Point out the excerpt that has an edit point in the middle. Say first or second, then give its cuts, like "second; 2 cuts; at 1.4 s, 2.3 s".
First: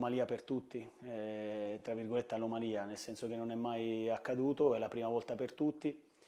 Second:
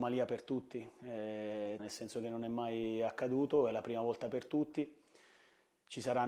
second; 1 cut; at 1.8 s